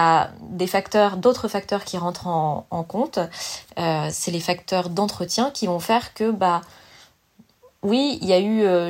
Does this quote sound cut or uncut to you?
uncut